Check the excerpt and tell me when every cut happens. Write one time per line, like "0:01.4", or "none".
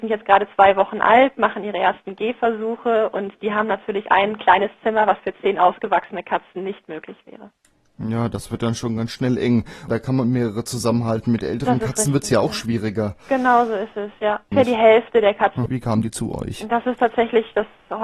0:09.9
0:14.5
0:15.7

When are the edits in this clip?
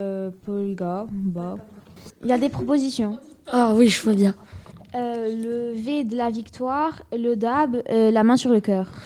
none

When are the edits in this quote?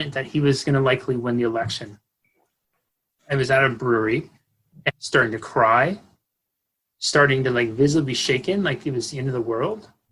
0:04.9

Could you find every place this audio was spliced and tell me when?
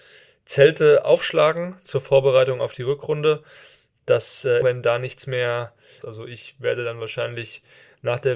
0:04.6
0:06.0

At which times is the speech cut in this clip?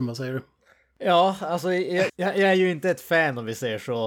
0:02.1

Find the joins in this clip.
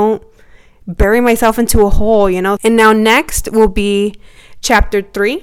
0:02.6

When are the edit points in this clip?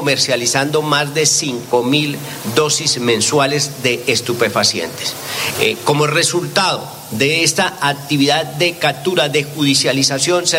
0:05.5

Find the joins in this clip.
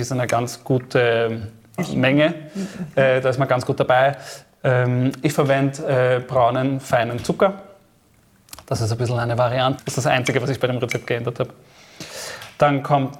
0:09.8

